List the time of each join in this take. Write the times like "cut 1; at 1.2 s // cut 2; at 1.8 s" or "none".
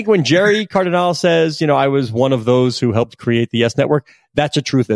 none

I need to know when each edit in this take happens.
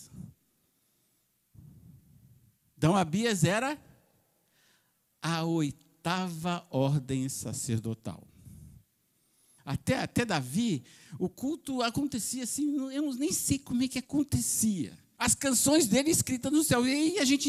cut 1; at 9.6 s // cut 2; at 15.2 s

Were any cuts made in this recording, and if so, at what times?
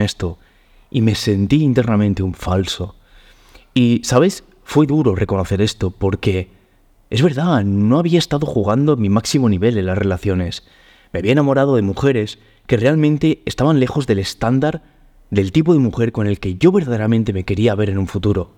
none

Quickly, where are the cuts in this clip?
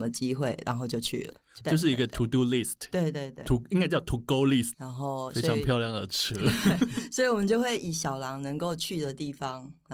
cut 1; at 1.6 s // cut 2; at 4.7 s

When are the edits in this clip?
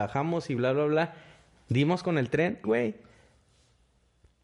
cut 1; at 2.6 s

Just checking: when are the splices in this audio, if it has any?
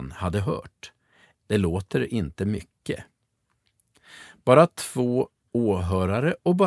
cut 1; at 1.3 s

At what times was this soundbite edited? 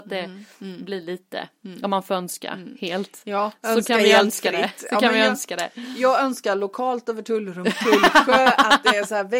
none

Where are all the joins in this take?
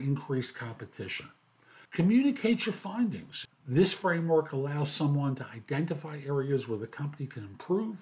cut 1; at 1.8 s // cut 2; at 3.4 s

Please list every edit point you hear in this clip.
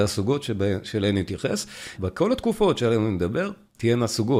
cut 1; at 2.0 s

